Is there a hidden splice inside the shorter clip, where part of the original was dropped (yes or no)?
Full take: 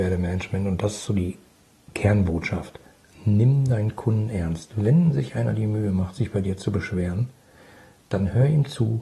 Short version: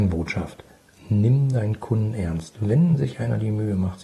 no